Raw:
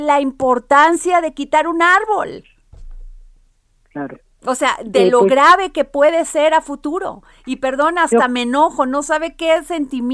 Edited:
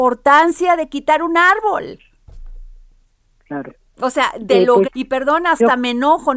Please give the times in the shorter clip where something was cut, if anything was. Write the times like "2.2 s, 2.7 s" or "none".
4.8 s